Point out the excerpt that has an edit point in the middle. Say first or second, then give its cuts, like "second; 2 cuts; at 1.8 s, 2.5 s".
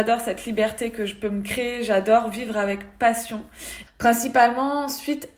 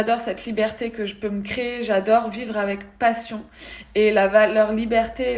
first; 1 cut; at 3.9 s